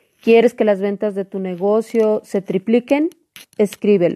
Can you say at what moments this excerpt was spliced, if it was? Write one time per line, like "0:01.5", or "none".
none